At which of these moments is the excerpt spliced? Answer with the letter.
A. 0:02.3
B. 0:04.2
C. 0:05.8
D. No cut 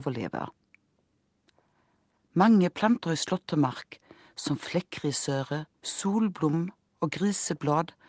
C